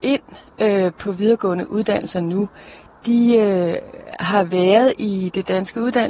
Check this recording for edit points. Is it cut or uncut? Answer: uncut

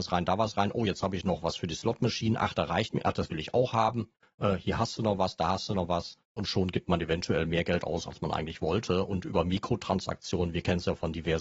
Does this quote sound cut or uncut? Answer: uncut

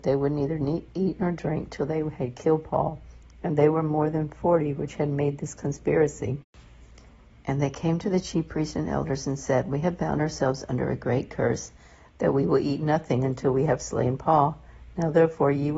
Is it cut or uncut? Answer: uncut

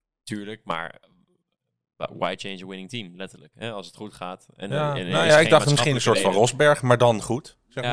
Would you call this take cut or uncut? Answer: uncut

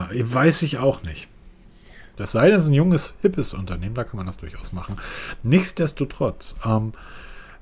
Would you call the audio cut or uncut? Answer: cut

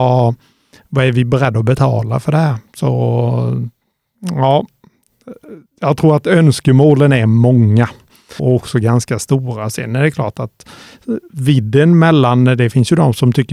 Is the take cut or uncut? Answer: cut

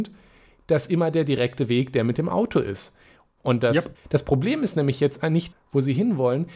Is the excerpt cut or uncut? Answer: cut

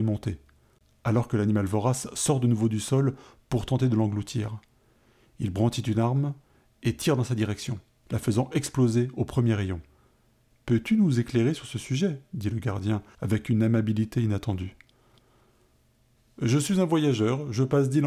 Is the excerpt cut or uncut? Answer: cut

